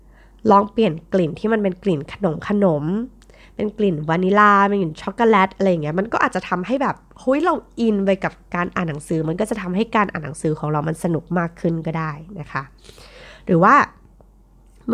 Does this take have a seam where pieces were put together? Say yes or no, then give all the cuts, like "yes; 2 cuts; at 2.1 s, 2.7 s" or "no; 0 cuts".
no; 0 cuts